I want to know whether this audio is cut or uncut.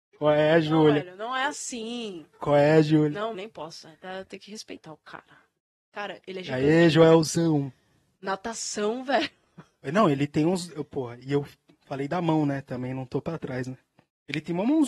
cut